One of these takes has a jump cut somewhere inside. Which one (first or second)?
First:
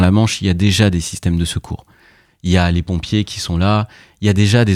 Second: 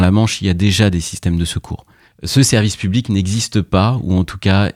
second